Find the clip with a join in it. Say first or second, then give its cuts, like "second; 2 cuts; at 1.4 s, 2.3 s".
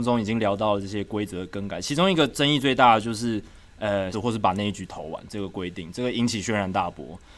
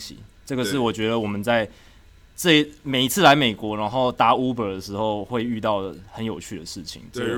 first; 1 cut; at 4.1 s